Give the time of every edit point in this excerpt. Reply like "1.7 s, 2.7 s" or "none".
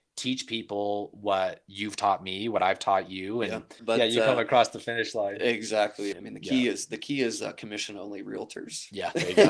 3.8 s, 6.1 s